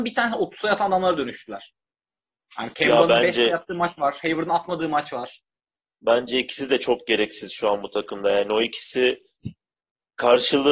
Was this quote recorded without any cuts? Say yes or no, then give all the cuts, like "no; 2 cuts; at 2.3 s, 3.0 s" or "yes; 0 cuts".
yes; 0 cuts